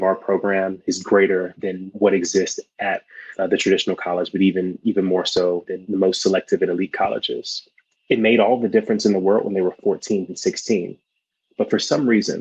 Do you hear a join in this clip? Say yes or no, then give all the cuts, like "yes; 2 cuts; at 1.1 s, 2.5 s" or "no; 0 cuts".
yes; 2 cuts; at 7.9 s, 10.3 s